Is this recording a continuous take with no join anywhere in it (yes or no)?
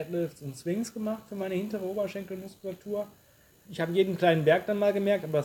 no